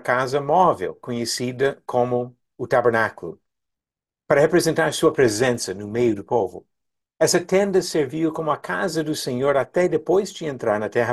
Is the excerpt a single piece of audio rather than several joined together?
yes; 0 cuts

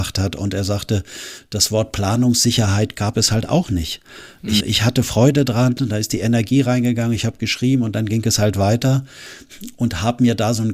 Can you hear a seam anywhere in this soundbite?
yes; 1 cut; at 4.6 s

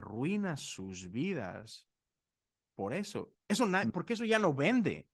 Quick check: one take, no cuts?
no; 1 cut; at 3.3 s

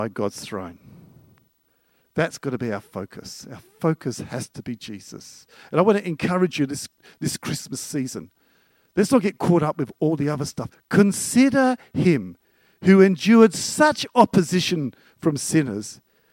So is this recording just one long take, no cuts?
no; 1 cut; at 10.7 s

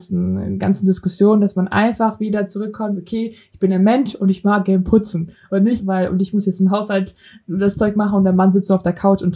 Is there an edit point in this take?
yes; 1 cut; at 5.8 s

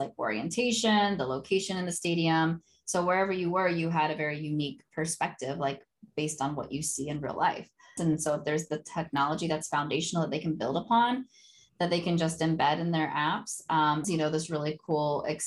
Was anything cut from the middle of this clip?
yes; 2 cuts; at 8.0 s, 14.0 s

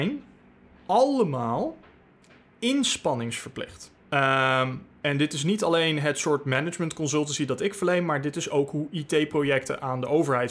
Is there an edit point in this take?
yes; 1 cut; at 4.0 s

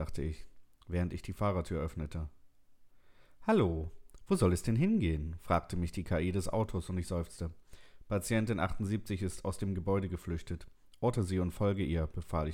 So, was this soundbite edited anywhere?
no; 0 cuts

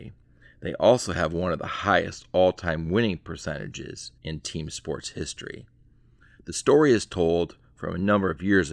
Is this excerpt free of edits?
no; 1 cut; at 4.2 s

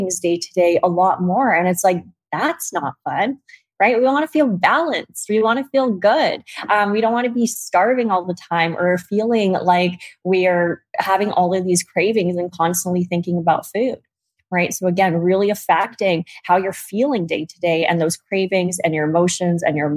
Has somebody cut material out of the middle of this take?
no; 0 cuts

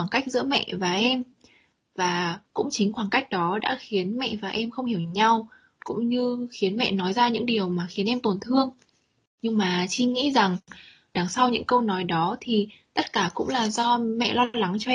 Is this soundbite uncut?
no; 1 cut; at 2.5 s

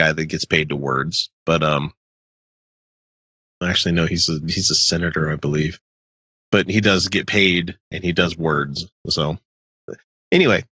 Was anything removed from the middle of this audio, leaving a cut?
no; 0 cuts

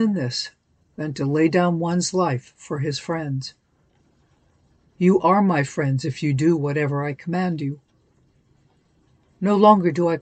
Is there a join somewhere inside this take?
no; 0 cuts

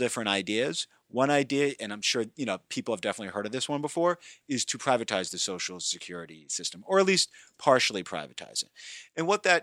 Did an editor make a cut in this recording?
yes; 1 cut; at 4.4 s

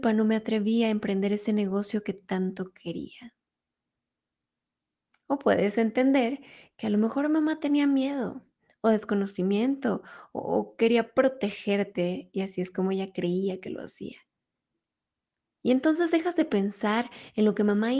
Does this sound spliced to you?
no; 0 cuts

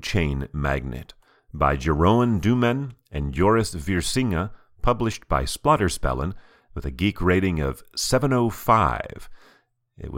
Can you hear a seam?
no; 0 cuts

